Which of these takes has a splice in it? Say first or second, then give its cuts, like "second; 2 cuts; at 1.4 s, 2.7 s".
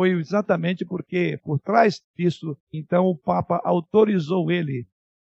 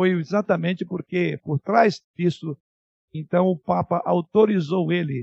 first; 1 cut; at 2.6 s